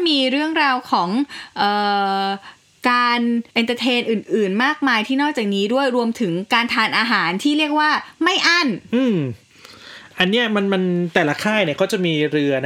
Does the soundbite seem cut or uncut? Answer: cut